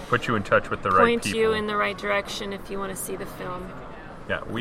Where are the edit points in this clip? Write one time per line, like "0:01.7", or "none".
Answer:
none